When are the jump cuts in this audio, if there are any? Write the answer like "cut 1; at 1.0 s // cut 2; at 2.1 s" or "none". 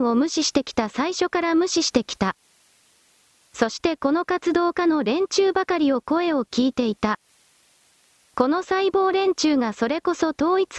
cut 1; at 8.2 s

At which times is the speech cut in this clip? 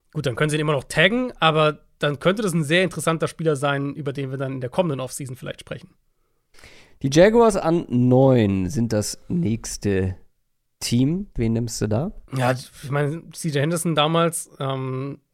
cut 1; at 12.3 s

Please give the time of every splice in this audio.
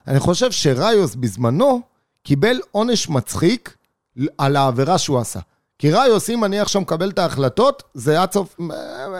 none

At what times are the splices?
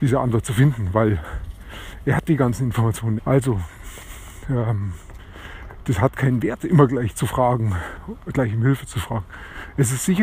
cut 1; at 3.2 s

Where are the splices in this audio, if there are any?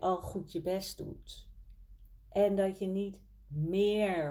cut 1; at 2.2 s

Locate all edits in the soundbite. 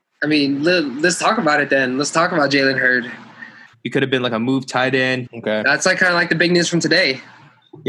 cut 1; at 3.7 s // cut 2; at 5.3 s

